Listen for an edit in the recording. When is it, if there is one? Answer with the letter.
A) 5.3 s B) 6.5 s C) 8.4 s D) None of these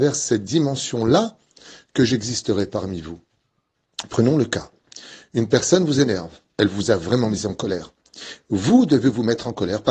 B